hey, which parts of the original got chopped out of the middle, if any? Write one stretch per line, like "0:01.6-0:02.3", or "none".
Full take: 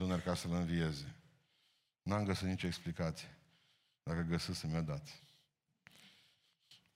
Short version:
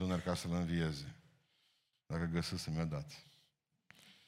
0:01.9-0:03.9